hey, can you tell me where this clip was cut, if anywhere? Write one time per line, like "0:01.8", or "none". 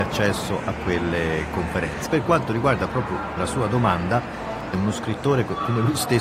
0:02.1
0:04.7